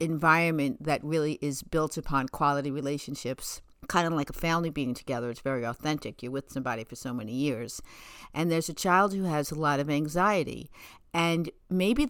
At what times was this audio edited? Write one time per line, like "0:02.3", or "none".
none